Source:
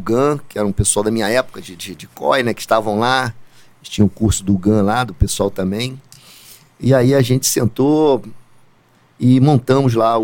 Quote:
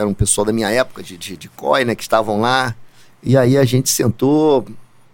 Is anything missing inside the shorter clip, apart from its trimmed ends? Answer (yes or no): yes